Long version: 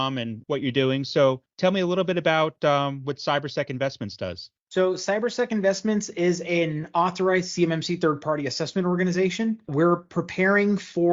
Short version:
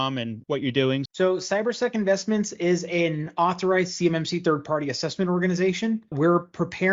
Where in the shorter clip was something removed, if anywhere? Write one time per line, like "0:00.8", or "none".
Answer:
0:01.1